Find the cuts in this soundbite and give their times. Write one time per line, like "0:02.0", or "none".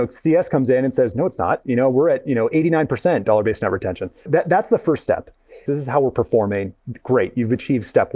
0:04.3
0:05.7